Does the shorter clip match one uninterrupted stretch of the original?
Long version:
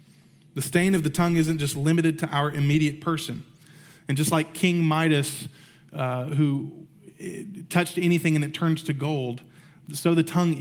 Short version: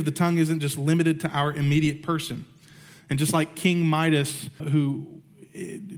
no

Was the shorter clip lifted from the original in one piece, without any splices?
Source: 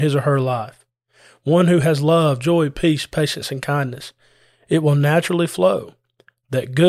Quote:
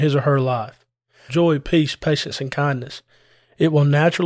no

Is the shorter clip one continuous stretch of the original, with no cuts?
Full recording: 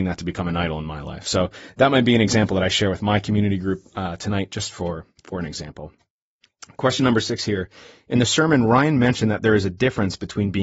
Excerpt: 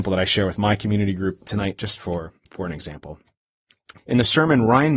no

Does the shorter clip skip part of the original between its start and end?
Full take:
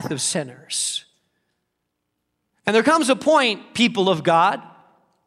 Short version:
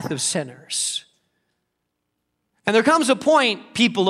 no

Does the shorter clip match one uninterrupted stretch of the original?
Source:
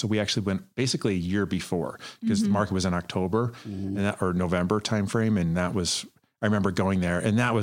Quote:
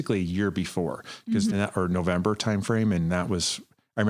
no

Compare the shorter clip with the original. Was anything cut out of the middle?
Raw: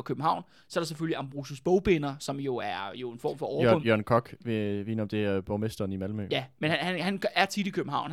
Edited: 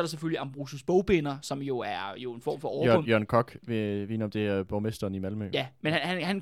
no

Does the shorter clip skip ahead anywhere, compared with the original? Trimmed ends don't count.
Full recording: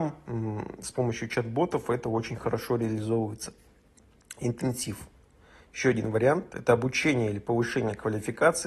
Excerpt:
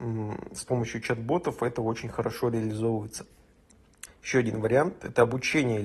yes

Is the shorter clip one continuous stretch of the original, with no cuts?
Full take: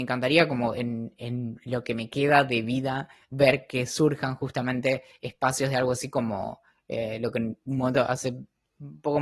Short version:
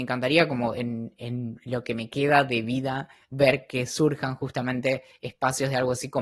yes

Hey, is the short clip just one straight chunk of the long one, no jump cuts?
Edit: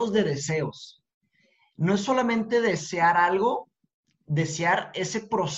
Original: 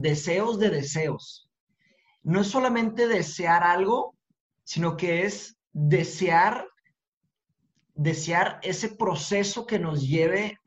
no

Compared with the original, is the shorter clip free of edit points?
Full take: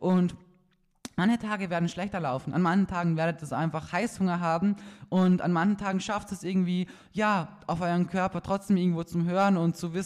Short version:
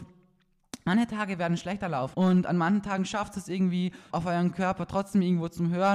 no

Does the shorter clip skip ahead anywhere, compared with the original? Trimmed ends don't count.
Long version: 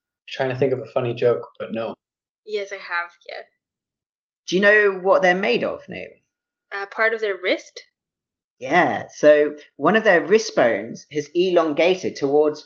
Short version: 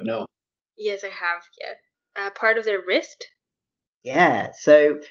yes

